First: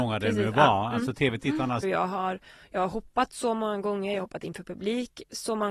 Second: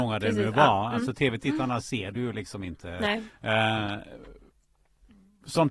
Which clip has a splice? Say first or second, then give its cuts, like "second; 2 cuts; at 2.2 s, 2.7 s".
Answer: first; 1 cut; at 1.8 s